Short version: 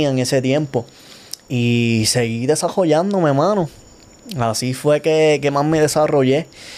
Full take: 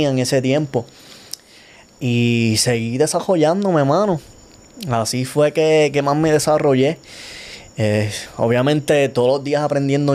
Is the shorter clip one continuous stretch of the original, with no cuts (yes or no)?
no